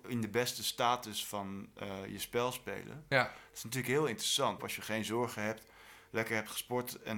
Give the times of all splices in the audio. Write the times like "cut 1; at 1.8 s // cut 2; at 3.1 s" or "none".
cut 1; at 4.6 s